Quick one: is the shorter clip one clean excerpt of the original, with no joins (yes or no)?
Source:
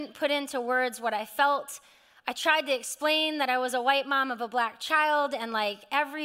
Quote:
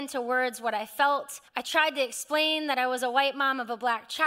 no